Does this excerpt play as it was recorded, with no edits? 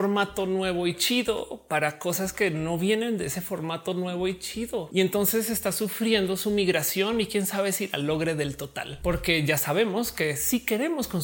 yes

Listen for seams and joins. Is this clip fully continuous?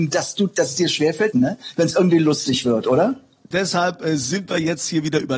no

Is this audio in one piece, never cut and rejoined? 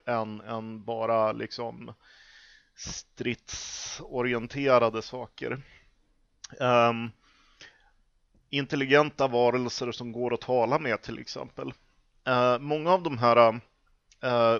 yes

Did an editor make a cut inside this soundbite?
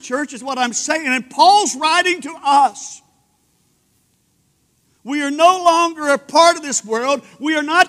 no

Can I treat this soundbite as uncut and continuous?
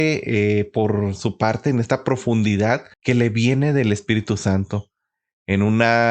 no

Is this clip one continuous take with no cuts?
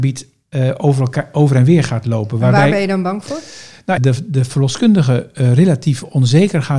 no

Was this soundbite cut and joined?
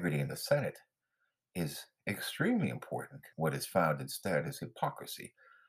yes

